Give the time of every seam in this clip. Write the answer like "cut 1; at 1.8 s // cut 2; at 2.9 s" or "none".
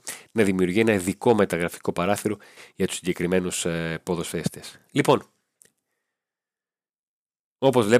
none